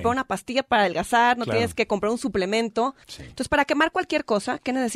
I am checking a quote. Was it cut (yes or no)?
yes